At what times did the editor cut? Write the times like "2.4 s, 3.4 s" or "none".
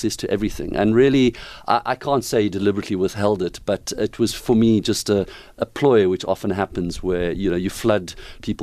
none